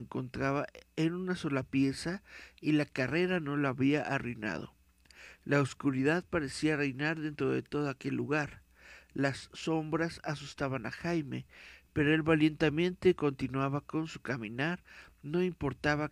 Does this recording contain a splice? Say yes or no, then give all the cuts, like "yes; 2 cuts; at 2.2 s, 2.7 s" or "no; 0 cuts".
no; 0 cuts